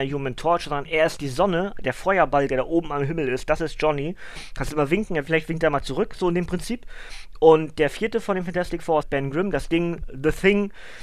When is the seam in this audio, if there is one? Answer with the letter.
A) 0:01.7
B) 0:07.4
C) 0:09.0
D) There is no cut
C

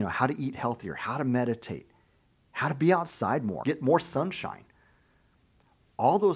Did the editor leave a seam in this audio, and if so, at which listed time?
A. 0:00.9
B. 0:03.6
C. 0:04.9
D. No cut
B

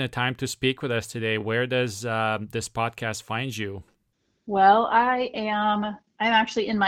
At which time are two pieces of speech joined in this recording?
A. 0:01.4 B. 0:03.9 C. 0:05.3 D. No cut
D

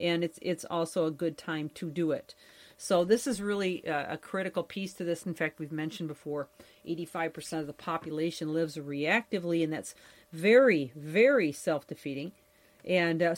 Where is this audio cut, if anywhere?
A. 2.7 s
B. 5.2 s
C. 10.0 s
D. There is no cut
B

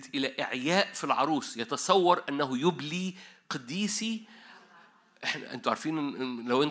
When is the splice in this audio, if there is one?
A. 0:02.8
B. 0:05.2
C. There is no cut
C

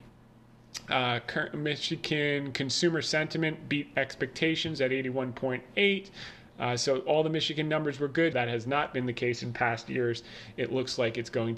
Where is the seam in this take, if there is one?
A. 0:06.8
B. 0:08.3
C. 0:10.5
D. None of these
B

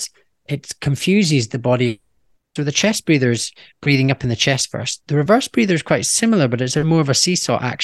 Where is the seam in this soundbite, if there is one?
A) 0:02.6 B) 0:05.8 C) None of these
A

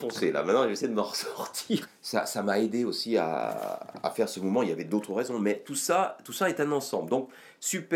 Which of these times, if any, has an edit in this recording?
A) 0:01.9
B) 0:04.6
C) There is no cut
A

